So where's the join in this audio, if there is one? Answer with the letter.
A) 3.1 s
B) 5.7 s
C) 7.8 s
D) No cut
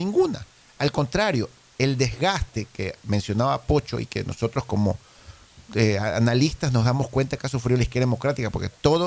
B